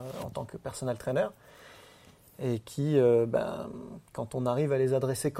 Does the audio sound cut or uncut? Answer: uncut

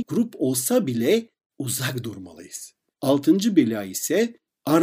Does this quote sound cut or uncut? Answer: cut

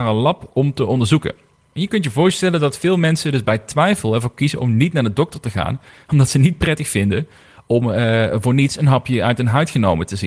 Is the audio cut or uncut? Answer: uncut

